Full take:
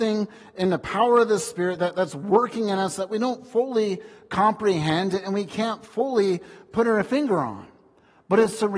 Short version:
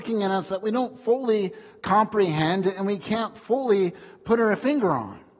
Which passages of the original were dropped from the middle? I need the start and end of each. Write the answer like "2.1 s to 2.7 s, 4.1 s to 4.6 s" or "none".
none